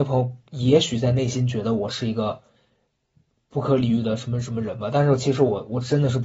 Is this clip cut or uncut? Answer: uncut